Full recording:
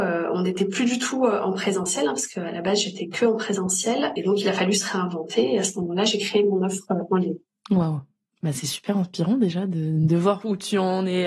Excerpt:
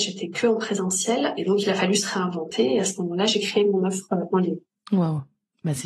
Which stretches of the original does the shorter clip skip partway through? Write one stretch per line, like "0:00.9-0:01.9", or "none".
none